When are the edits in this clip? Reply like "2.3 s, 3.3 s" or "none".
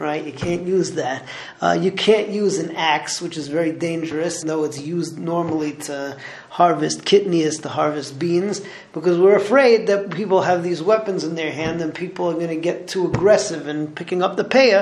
4.4 s

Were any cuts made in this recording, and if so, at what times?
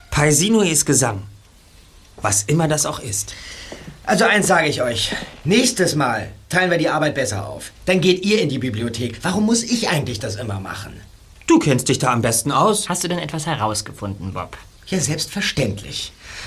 none

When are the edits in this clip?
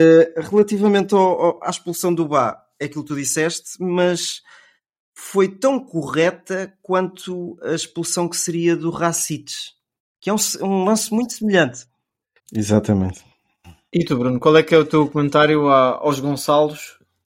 12.4 s

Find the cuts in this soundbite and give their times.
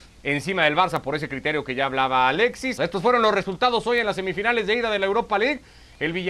2.8 s

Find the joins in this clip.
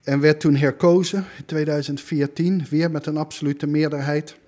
none

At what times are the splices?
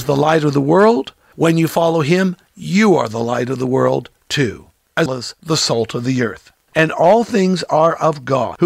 5.1 s, 6.7 s

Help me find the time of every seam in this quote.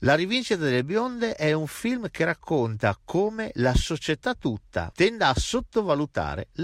4.9 s

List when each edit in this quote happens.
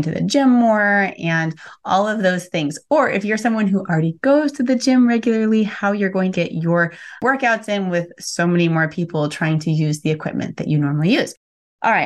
6.3 s

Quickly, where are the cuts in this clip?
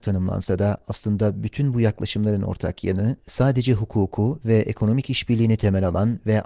3.2 s

